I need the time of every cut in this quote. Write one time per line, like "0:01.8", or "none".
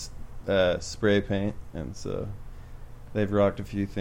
none